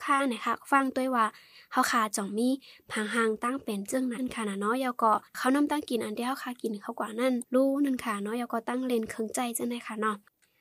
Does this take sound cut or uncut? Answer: cut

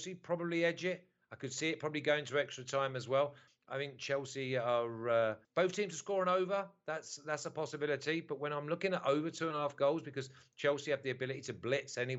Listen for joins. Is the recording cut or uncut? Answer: cut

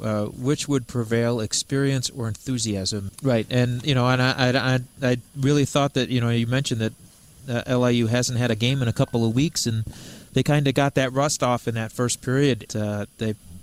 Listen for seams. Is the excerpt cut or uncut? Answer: cut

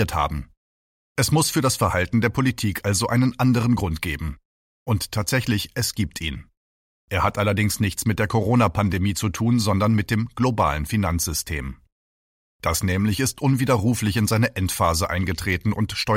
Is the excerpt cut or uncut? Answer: uncut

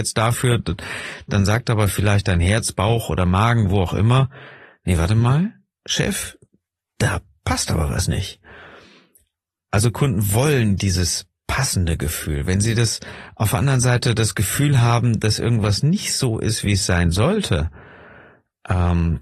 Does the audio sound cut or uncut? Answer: uncut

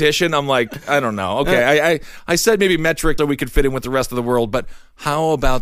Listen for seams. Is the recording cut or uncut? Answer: cut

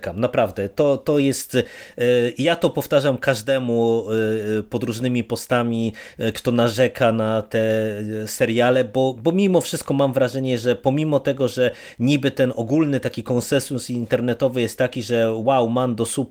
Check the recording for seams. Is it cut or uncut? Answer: uncut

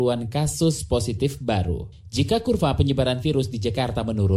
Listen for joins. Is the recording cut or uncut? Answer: cut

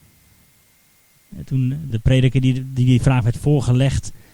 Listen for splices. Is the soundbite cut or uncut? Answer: cut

